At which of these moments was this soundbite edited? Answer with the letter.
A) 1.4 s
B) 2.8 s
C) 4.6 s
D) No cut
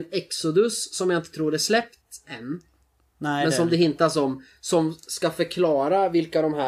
D